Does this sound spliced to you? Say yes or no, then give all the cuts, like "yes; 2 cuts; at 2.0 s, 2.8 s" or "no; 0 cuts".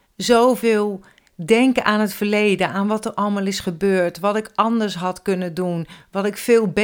no; 0 cuts